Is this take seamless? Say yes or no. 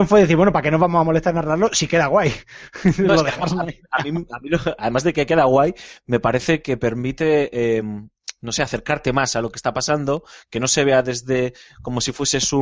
yes